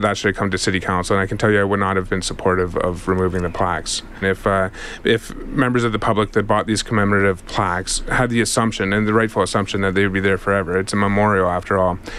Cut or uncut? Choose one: cut